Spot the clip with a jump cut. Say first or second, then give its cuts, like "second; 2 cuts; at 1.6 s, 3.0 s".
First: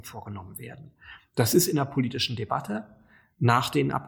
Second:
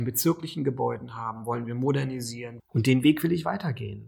second; 1 cut; at 2.6 s